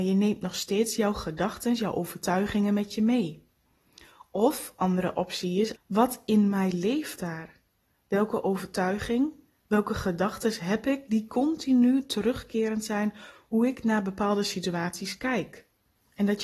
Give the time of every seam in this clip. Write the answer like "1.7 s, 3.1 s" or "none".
5.8 s